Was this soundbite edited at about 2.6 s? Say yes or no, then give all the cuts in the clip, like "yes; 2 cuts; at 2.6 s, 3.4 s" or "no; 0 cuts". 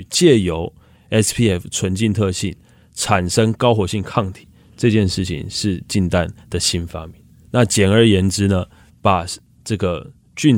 no; 2 cuts; at 7.5 s, 8.9 s